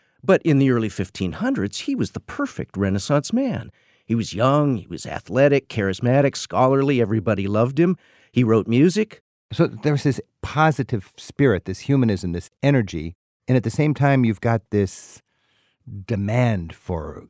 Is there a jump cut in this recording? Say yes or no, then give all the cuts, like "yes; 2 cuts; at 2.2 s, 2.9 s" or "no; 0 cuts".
no; 0 cuts